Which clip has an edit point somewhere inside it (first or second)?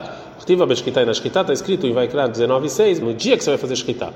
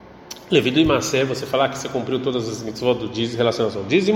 first